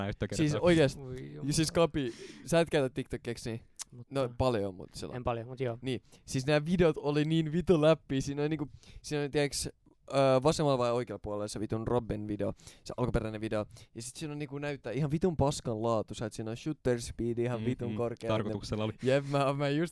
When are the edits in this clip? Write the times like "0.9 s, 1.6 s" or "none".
3.8 s